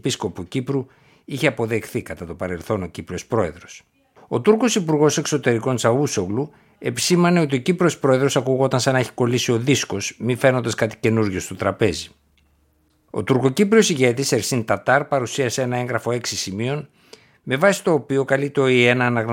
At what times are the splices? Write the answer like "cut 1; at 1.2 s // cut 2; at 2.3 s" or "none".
cut 1; at 4.2 s // cut 2; at 13.1 s